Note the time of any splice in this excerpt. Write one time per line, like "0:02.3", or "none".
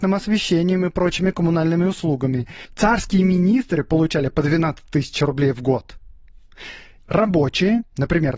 0:02.7
0:07.1